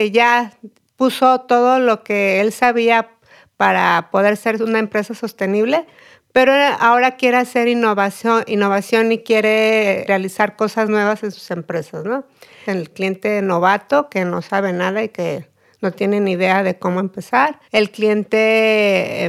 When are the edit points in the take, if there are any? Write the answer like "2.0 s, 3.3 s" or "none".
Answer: 12.7 s, 17.6 s